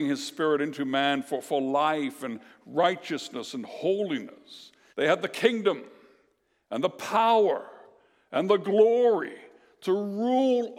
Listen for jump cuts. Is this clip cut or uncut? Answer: cut